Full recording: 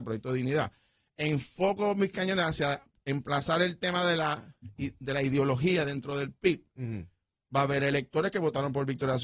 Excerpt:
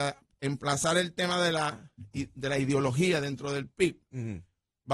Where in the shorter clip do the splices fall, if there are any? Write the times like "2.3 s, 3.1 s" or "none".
none